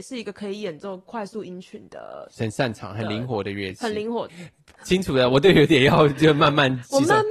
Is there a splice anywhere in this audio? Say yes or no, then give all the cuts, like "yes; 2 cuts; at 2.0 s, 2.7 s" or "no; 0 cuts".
yes; 1 cut; at 4.3 s